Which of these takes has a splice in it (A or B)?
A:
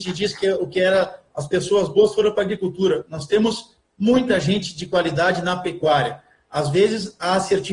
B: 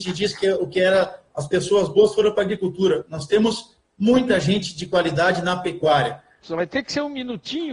B